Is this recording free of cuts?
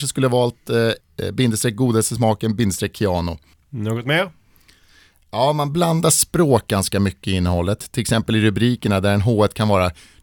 no; 2 cuts; at 1.0 s, 3.5 s

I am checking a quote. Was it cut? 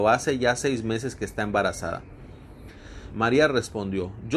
yes; 1 cut; at 3.1 s

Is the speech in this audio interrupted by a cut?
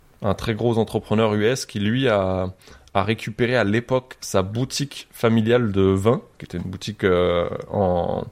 no; 0 cuts

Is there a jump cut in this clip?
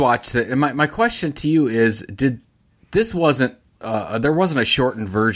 no; 0 cuts

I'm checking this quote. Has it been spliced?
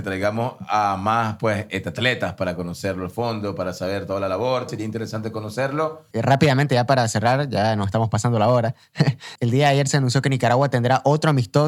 yes; 3 cuts; at 4.7 s, 6.1 s, 9.4 s

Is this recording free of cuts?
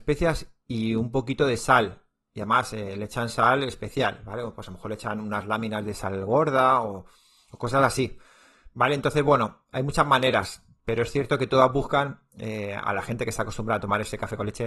yes; 0 cuts

